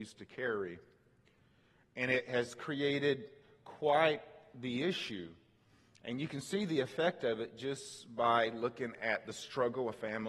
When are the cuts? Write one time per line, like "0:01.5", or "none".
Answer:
none

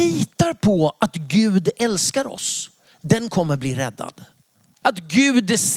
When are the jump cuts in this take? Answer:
0:04.8

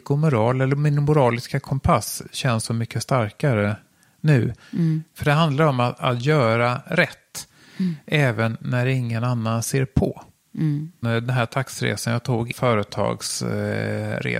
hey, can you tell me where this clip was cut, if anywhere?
0:11.0
0:12.5

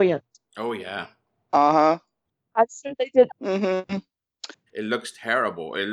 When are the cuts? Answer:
0:03.3
0:04.7

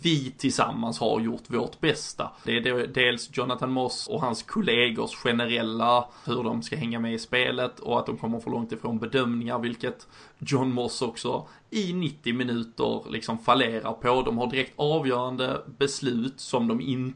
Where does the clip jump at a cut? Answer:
0:02.5
0:04.1
0:06.3

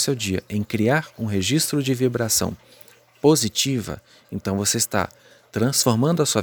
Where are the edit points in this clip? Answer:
none

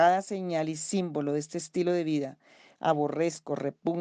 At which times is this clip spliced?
0:02.8

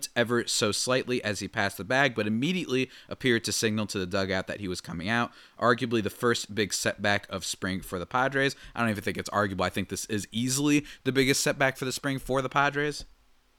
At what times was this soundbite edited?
none

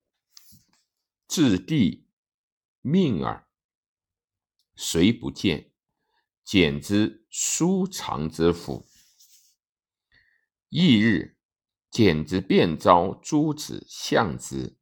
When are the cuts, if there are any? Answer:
0:11.7

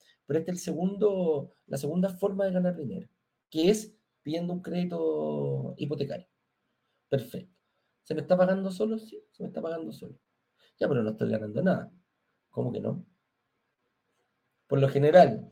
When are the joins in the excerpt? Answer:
0:07.0

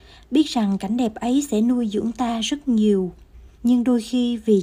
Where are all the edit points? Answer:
0:03.5

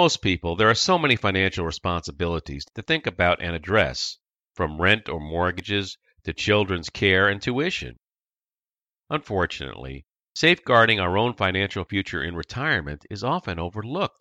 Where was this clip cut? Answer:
none

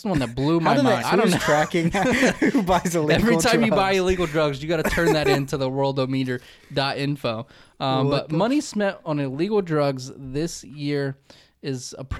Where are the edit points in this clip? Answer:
0:01.0

